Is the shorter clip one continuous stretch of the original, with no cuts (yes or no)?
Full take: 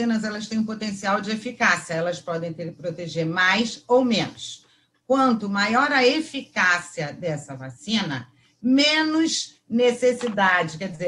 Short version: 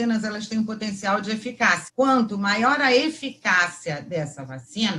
no